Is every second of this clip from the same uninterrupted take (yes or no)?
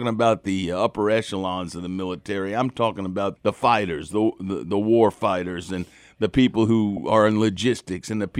no